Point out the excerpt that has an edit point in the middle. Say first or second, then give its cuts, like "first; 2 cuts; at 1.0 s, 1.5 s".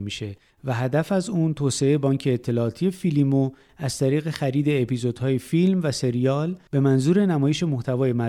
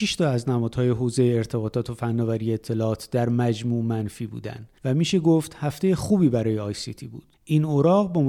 second; 1 cut; at 7.3 s